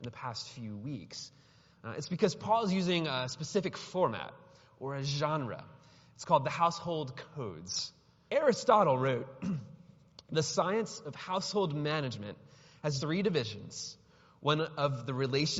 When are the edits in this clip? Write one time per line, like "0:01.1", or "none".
0:08.3
0:13.0